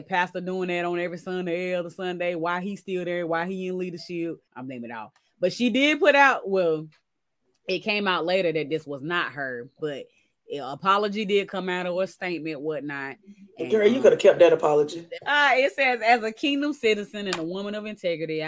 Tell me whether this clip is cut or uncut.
cut